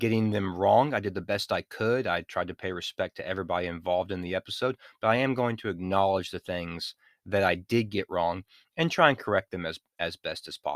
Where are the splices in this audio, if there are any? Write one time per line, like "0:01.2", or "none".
none